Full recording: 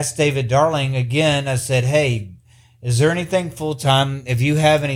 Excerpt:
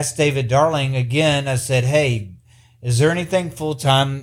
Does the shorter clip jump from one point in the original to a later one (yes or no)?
no